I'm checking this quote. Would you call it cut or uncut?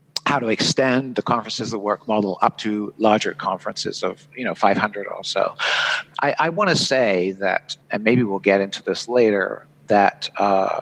cut